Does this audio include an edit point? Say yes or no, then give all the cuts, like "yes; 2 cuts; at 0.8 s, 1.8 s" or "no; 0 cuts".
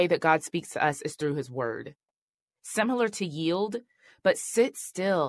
yes; 1 cut; at 2.5 s